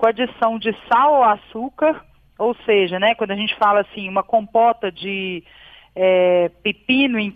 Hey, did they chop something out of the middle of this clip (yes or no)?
no